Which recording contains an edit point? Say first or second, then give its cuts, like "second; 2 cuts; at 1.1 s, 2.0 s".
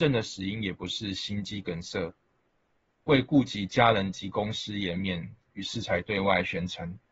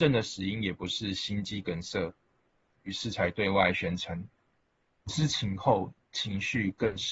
second; 1 cut; at 2.7 s